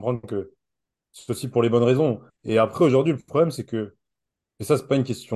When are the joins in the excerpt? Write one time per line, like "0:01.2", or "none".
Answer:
0:02.3